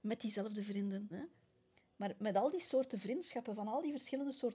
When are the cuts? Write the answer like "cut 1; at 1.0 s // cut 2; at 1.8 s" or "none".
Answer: cut 1; at 1.1 s